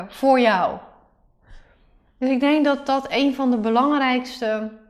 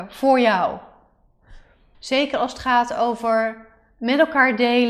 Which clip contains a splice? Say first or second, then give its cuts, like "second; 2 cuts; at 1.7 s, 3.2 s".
second; 1 cut; at 1.9 s